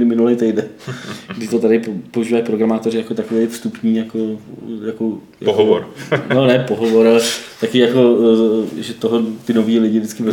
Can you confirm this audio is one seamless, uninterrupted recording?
no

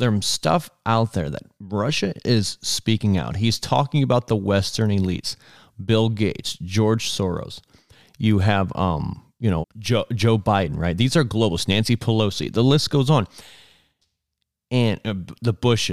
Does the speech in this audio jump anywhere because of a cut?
yes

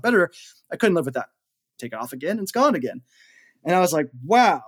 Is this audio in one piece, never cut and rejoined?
no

